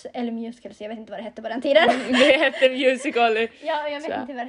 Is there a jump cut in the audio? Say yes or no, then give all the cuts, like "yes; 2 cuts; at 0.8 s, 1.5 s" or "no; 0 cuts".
no; 0 cuts